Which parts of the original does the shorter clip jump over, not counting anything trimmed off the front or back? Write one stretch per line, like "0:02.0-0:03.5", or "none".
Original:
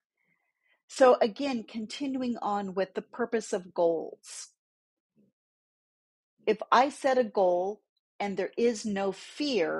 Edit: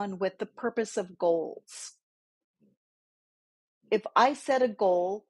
none